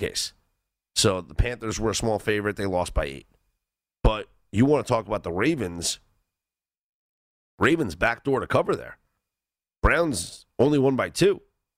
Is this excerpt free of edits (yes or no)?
no